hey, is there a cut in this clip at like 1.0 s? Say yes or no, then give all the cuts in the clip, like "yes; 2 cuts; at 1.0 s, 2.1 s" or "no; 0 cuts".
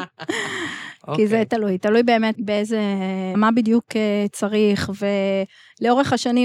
no; 2 cuts; at 2.3 s, 3.3 s